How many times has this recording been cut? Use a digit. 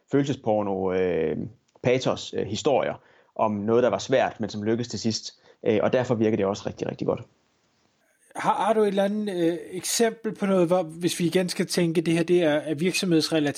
1